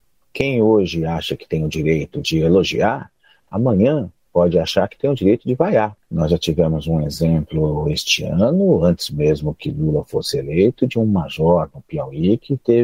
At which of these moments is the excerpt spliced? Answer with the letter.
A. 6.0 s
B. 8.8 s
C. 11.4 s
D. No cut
A